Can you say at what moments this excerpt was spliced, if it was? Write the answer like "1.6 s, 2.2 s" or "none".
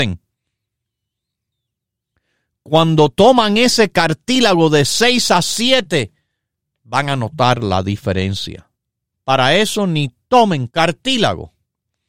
9.1 s, 10.7 s